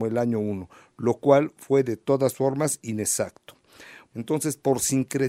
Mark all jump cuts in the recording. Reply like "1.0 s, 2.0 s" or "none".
4.1 s